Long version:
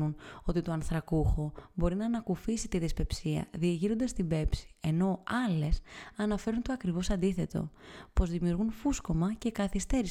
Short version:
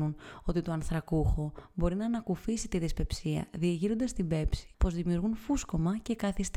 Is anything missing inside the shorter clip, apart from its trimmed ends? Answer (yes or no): yes